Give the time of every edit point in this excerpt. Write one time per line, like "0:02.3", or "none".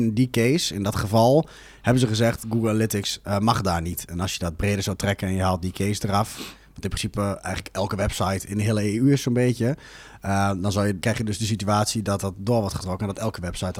0:11.0